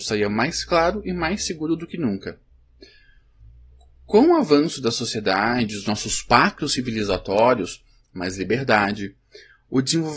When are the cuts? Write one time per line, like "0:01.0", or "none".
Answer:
0:08.0